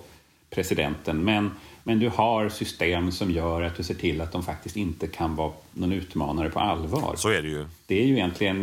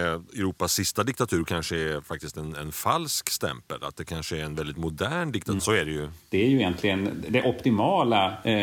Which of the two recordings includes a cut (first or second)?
second